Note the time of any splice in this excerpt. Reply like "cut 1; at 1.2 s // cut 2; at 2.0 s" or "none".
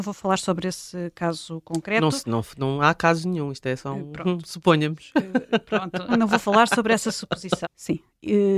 cut 1; at 6.1 s // cut 2; at 7.6 s